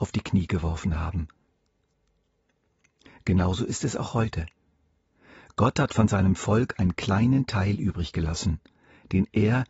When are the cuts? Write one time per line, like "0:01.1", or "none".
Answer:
none